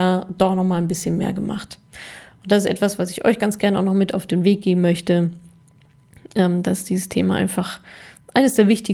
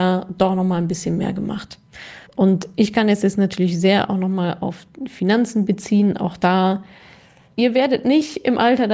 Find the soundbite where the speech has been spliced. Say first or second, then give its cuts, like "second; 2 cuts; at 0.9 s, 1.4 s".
second; 1 cut; at 2.3 s